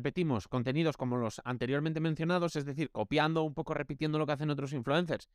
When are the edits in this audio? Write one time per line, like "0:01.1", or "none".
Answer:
none